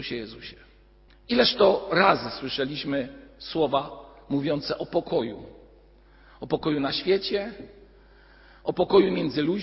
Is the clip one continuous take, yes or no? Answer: no